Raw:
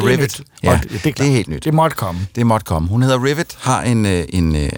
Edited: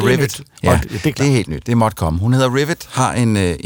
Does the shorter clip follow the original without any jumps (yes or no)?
no